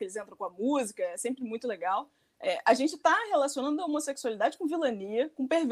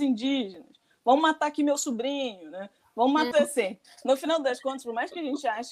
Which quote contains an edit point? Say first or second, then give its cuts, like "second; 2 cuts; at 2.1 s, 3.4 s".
second; 1 cut; at 3.3 s